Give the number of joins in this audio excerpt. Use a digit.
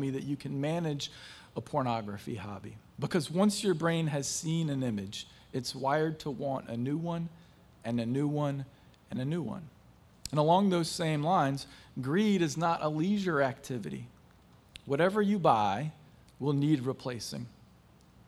1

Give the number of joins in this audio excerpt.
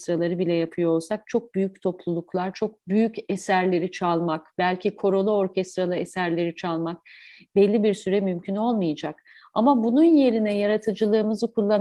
0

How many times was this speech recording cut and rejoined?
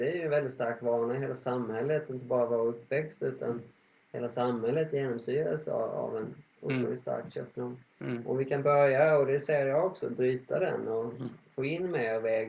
0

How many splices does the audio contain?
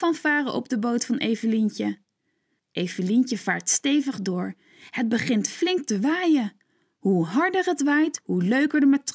1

